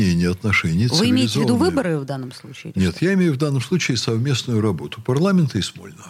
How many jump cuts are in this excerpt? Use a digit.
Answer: 0